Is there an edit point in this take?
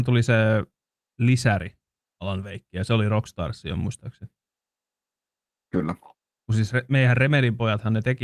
yes; 1 cut; at 6.4 s

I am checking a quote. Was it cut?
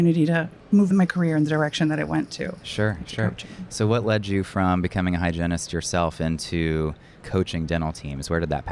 no; 0 cuts

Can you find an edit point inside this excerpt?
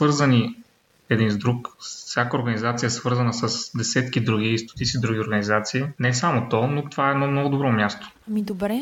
yes; 1 cut; at 5.9 s

